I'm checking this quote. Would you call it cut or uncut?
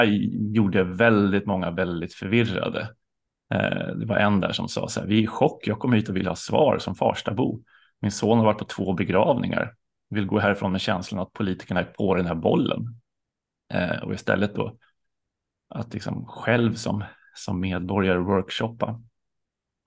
uncut